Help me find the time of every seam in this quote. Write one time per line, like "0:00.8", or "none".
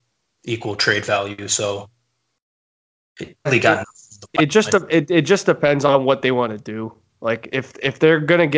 0:03.5